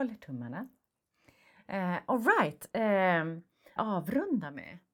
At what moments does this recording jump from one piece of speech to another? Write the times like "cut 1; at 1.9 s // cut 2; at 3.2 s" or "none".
cut 1; at 3.8 s